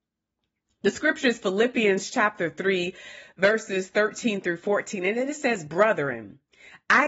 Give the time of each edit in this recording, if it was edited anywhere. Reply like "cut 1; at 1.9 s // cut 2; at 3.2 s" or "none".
none